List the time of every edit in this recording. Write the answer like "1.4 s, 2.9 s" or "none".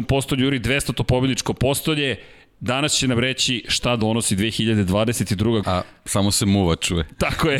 5.6 s